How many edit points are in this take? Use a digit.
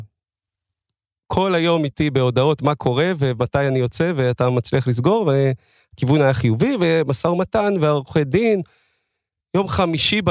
0